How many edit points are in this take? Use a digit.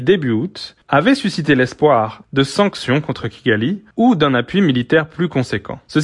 2